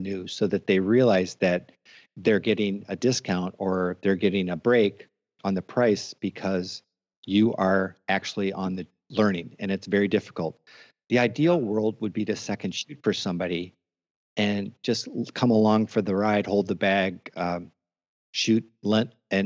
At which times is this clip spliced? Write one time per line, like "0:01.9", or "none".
none